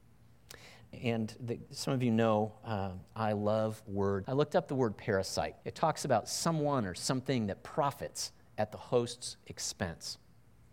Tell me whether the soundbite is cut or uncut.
cut